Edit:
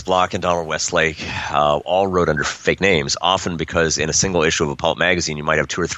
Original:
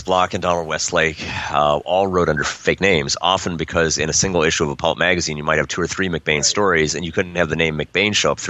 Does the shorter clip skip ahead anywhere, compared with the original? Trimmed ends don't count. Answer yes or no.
no